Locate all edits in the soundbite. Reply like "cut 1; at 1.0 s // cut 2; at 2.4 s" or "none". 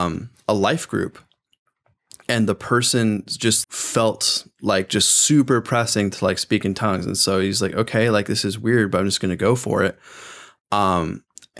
cut 1; at 3.6 s